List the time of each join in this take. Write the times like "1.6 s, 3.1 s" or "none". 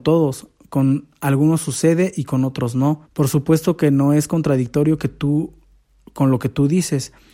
3.0 s